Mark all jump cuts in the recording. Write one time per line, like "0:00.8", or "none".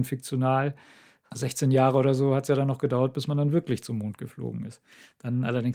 none